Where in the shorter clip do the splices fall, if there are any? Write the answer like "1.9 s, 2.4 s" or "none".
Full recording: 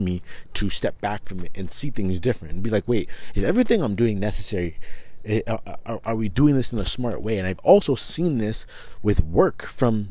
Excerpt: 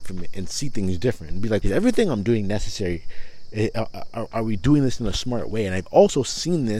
1.6 s